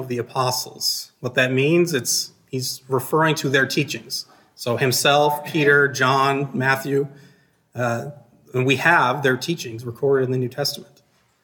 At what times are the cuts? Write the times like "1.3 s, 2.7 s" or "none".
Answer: none